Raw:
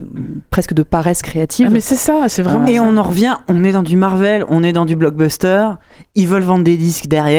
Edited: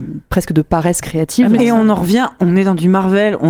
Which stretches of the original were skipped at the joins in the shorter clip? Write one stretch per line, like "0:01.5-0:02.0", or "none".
0:01.8-0:02.6